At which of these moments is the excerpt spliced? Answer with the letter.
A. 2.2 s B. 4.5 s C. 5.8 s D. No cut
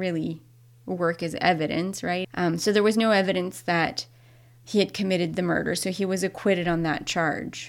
A